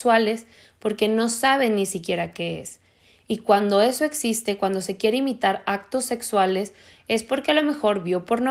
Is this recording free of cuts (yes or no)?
yes